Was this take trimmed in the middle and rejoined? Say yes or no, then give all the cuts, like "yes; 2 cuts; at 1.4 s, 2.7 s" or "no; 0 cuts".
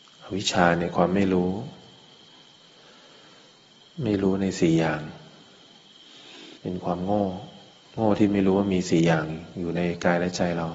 yes; 1 cut; at 6.6 s